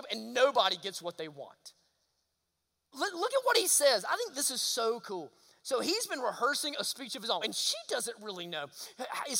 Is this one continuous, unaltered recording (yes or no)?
no